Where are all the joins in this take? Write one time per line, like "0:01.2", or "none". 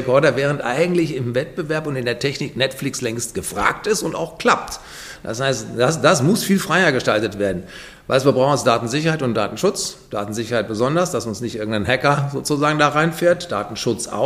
none